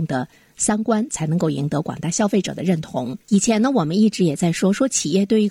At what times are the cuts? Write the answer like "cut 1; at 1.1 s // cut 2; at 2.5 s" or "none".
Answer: cut 1; at 3.2 s